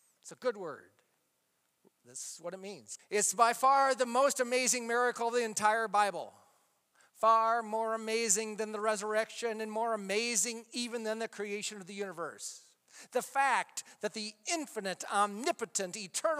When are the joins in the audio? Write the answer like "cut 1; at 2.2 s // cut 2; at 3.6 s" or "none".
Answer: cut 1; at 3.0 s